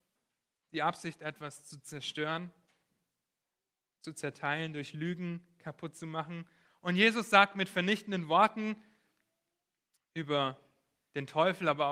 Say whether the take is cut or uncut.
uncut